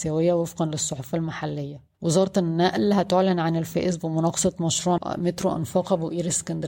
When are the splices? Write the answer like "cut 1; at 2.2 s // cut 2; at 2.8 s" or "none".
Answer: cut 1; at 1.9 s // cut 2; at 5.0 s